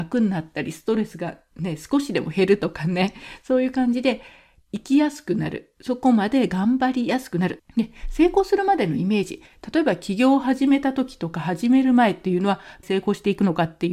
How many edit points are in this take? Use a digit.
2